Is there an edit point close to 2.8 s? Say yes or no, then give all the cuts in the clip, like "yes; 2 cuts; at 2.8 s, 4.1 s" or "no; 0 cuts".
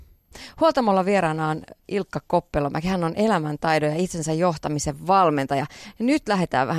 no; 0 cuts